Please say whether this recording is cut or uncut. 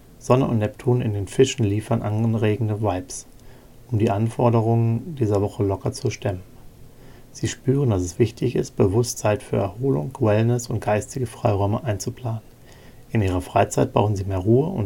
uncut